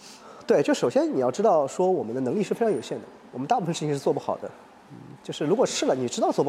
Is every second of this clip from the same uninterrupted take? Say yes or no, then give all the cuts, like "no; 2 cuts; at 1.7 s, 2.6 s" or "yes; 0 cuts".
yes; 0 cuts